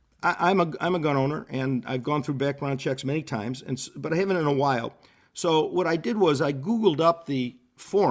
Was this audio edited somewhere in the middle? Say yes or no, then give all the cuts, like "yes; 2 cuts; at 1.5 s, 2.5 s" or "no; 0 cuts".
no; 0 cuts